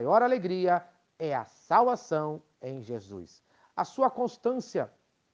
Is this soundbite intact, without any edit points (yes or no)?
yes